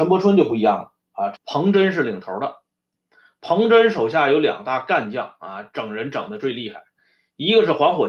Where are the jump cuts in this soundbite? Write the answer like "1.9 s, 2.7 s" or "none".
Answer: 1.3 s